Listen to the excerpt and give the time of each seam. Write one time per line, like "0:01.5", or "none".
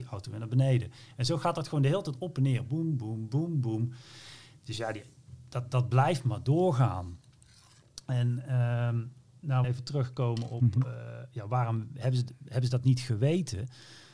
0:09.6